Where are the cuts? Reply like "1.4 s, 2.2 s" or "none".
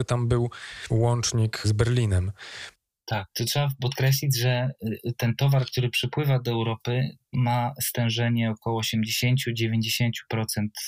none

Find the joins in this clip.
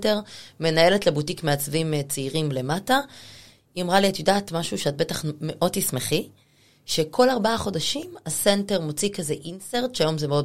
none

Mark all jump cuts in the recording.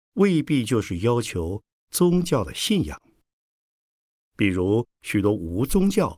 none

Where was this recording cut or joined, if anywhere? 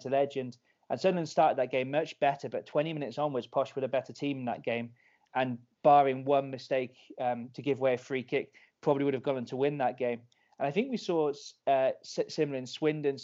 none

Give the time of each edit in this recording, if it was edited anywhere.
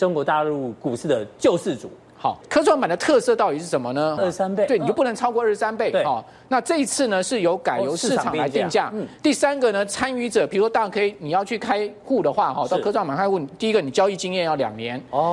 4.2 s

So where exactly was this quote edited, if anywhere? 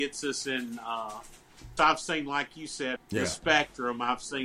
1.8 s, 3.0 s

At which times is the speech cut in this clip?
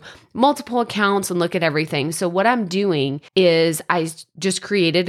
3.3 s

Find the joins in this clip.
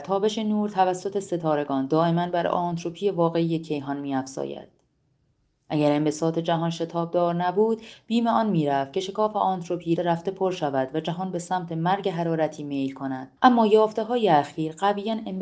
10.0 s, 13.4 s

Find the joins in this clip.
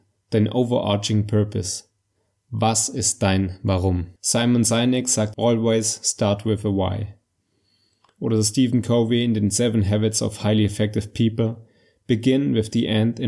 4.2 s, 5.3 s

